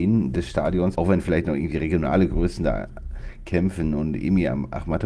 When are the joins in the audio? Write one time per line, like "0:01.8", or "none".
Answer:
0:00.9